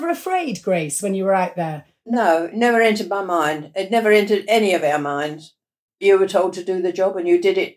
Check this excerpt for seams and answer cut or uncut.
cut